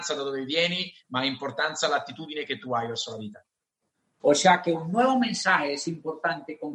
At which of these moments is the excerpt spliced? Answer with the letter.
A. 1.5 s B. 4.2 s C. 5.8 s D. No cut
B